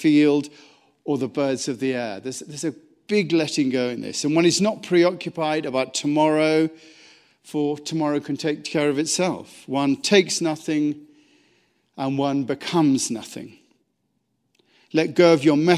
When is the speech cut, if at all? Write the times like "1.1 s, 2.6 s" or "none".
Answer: none

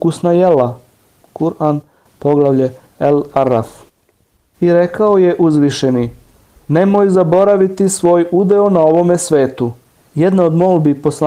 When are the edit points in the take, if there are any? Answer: 10.0 s

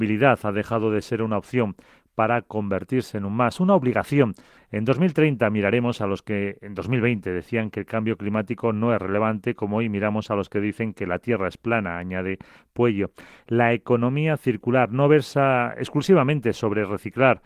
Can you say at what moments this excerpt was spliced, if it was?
4.6 s

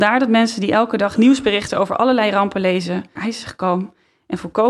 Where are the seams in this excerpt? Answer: 3.2 s

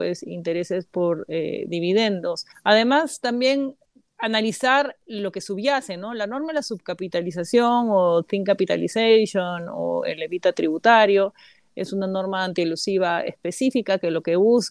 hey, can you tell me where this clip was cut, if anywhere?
2.5 s

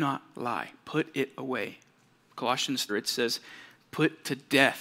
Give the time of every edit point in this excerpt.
2.9 s

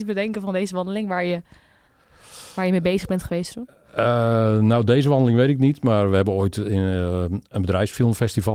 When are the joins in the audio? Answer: none

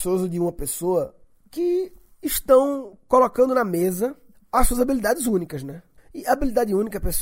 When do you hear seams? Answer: none

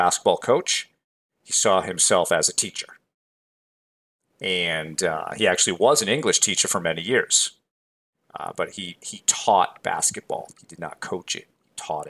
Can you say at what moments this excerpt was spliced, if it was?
10.5 s

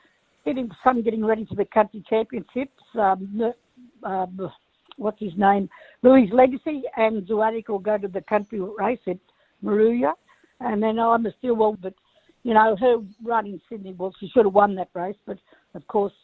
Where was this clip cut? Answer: 11.8 s

